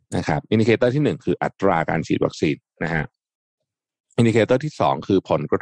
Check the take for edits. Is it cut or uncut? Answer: uncut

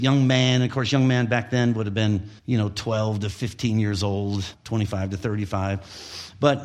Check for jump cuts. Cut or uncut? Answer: cut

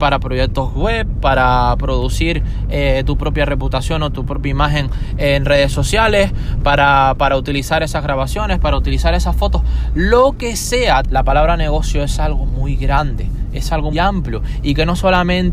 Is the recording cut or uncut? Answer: cut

